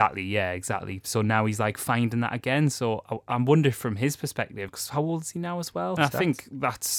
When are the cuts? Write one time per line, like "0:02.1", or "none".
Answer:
0:04.7
0:06.0